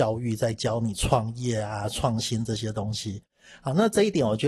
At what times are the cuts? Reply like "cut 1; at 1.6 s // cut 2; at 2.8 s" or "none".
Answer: none